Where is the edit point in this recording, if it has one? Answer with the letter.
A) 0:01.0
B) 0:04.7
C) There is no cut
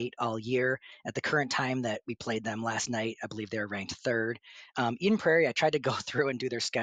C